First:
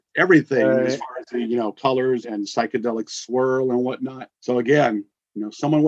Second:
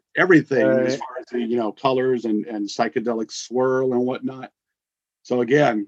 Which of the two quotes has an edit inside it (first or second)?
first